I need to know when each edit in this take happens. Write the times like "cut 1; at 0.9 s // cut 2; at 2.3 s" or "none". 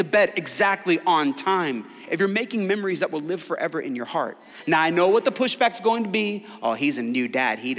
none